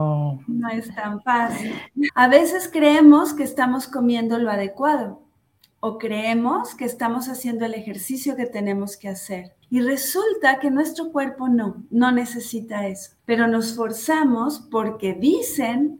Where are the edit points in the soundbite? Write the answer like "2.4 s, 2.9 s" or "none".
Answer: 2.1 s, 9.6 s, 13.2 s